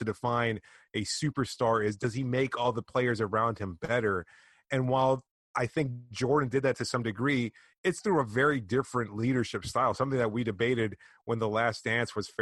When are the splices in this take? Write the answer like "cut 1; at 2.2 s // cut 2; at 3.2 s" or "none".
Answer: none